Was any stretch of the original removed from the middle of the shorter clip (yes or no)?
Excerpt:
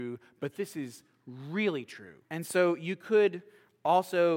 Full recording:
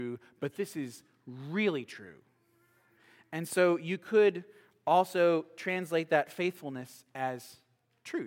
yes